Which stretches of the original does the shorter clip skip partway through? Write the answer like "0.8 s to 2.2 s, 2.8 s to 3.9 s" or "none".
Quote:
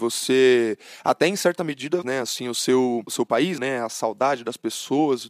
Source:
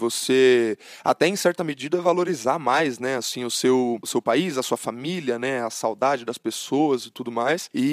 2.0 s to 3.0 s, 4.5 s to 5.4 s